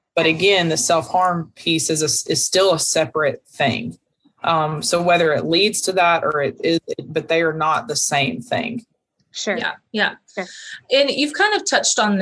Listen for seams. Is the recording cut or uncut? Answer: uncut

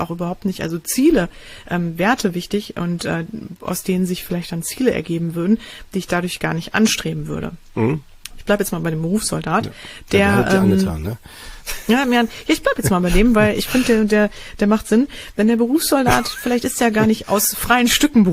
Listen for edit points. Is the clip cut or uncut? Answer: cut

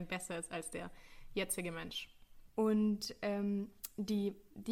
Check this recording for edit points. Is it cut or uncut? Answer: cut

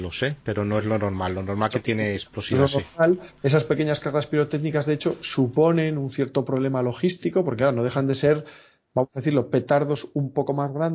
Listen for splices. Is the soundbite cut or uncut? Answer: uncut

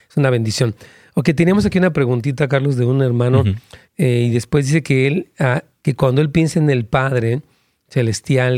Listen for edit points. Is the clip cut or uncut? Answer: cut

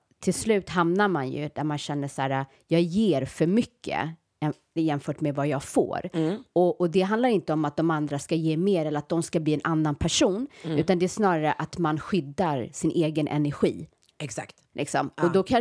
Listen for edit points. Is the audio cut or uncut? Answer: uncut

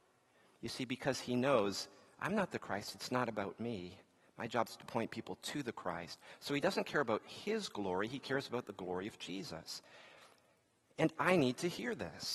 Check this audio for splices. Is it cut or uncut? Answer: uncut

